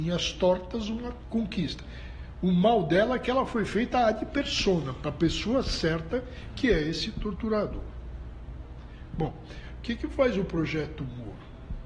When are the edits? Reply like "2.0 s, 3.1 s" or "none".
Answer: none